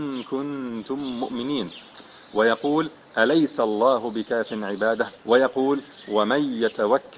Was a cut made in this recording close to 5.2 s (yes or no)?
yes